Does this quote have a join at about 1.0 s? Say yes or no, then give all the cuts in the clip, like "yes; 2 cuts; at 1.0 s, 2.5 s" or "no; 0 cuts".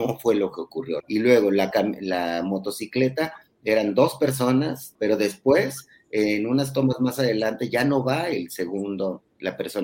yes; 2 cuts; at 1.0 s, 4.9 s